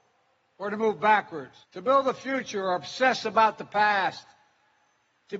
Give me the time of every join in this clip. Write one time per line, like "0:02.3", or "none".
0:01.6